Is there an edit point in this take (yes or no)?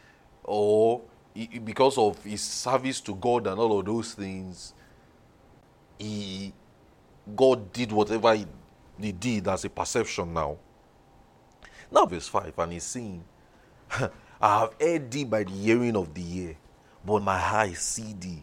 yes